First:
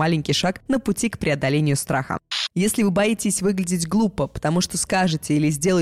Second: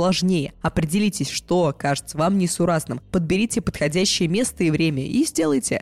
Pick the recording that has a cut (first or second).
first